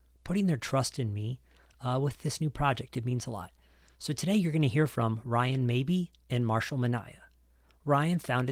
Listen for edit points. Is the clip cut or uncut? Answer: uncut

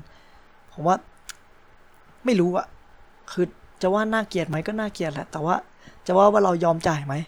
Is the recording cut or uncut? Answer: uncut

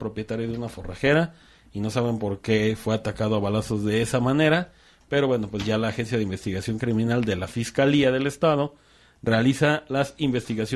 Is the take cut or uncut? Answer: uncut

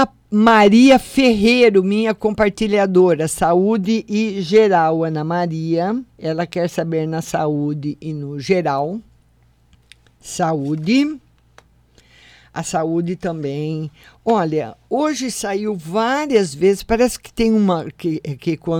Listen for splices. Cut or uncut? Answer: cut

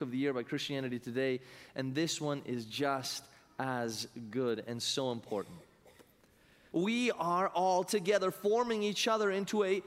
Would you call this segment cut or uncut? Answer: cut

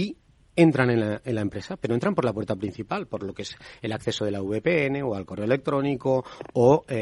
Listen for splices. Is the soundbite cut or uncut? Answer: uncut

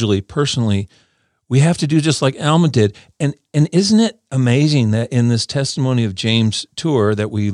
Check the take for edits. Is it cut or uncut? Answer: uncut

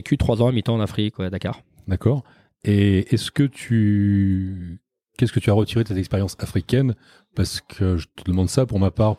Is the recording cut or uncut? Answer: uncut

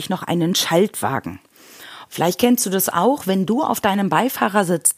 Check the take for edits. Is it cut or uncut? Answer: cut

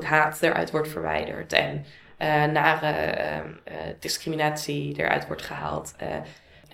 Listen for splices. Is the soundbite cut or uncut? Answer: uncut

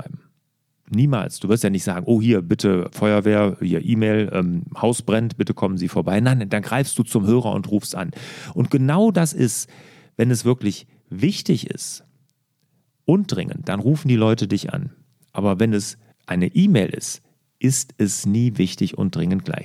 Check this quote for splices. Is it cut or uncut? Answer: uncut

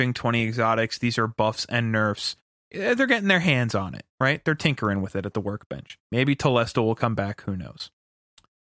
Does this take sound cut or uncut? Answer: uncut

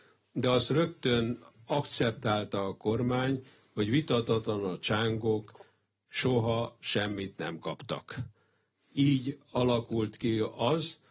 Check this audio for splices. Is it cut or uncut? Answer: uncut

